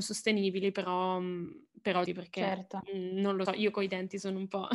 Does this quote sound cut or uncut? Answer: cut